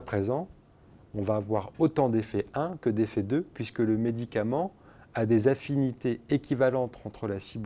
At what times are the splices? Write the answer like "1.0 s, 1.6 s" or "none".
none